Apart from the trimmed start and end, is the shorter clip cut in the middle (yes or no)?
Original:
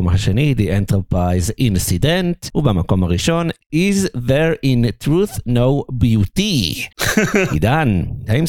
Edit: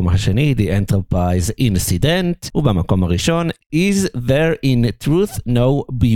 no